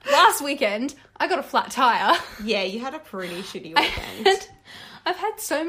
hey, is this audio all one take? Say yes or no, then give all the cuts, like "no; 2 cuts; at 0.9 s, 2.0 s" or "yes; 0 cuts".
yes; 0 cuts